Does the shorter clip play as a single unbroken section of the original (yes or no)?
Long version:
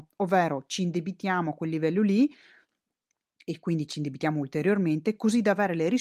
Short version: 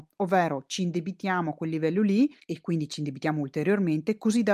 no